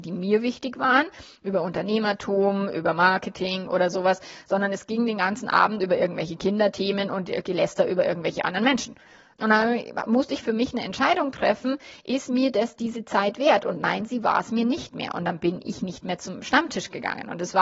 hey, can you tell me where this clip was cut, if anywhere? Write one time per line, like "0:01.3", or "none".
0:09.3